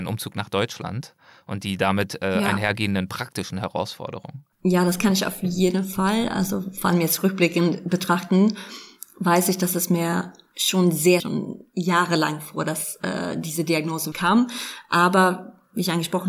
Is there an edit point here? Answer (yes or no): yes